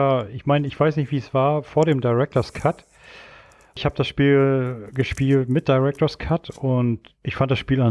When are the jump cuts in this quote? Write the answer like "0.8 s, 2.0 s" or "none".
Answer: none

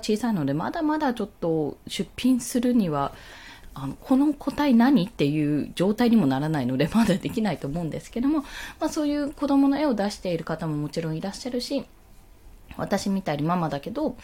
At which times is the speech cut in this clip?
12.6 s

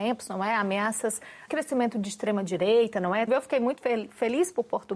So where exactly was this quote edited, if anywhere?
1.5 s, 3.3 s

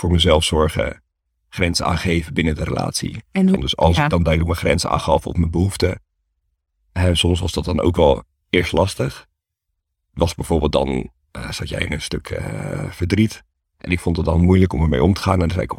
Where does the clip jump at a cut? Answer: 3.6 s

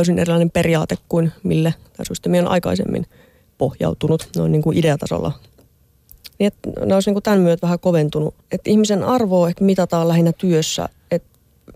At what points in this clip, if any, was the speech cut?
6.3 s, 8.4 s

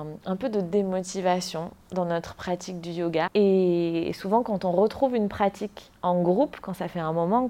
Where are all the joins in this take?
3.3 s

